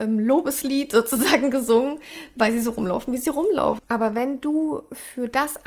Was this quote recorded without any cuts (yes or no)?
no